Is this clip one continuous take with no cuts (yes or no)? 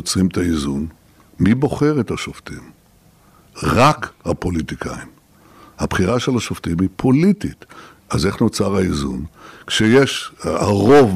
yes